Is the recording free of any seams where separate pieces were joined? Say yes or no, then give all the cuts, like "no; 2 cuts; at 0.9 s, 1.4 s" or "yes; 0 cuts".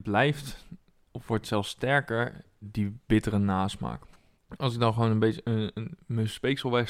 yes; 0 cuts